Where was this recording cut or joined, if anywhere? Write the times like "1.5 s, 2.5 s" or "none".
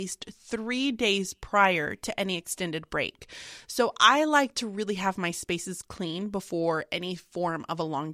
none